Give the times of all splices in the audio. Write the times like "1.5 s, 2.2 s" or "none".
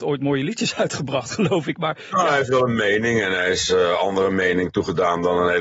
none